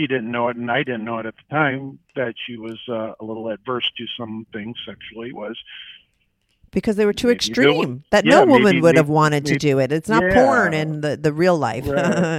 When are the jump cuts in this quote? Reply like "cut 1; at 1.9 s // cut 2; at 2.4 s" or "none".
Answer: cut 1; at 8.1 s